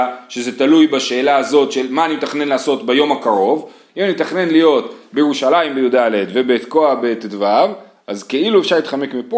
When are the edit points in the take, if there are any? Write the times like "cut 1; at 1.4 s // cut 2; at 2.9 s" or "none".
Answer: cut 1; at 3.9 s